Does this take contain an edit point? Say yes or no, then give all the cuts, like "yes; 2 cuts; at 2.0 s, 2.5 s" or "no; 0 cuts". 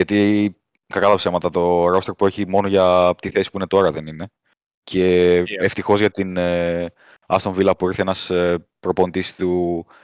no; 0 cuts